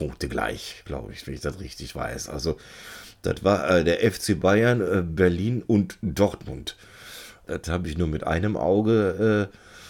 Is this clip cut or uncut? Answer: cut